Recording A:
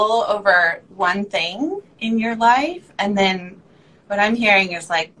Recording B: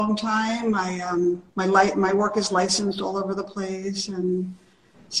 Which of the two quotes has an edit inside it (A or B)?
B